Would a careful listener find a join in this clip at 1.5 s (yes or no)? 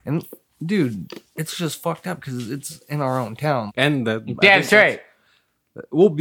no